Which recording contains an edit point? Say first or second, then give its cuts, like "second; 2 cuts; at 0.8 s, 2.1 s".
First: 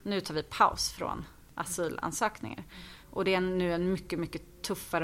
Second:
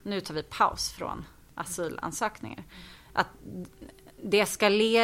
first; 1 cut; at 3.0 s